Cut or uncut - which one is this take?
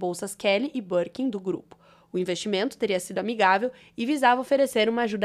uncut